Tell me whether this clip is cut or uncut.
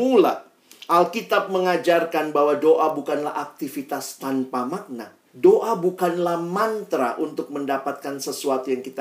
cut